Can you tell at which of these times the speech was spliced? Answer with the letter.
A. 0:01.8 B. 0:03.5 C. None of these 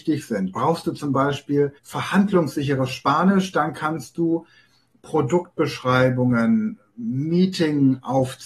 A